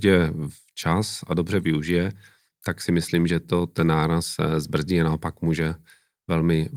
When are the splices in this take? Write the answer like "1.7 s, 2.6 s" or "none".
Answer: none